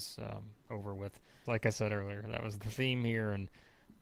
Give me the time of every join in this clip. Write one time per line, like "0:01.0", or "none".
0:01.5